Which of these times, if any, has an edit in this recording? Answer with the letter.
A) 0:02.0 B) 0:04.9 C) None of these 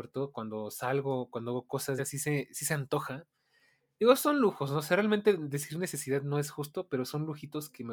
A